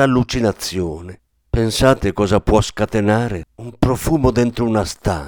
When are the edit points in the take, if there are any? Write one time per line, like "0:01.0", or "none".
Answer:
0:01.5
0:03.5